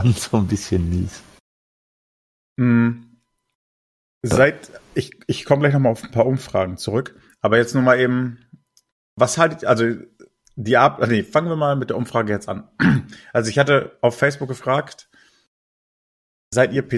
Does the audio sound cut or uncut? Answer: uncut